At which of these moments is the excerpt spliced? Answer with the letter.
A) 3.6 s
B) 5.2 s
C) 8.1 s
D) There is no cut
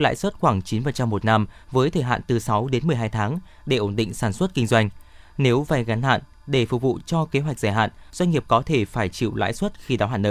C